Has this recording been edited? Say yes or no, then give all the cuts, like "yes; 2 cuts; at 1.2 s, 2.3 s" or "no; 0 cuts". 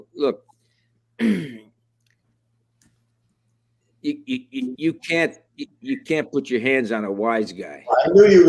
no; 0 cuts